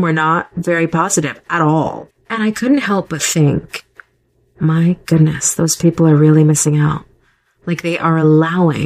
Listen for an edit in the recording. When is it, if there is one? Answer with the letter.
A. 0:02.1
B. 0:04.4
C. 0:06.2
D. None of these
A